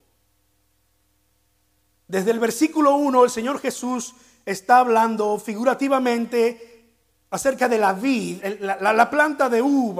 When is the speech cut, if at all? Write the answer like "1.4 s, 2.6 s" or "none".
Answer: 8.4 s